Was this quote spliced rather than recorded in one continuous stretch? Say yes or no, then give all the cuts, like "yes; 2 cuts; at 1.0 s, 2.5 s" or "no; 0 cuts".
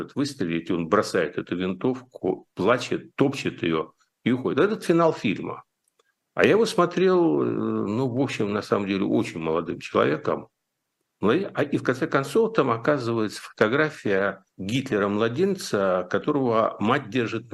yes; 2 cuts; at 11.0 s, 14.5 s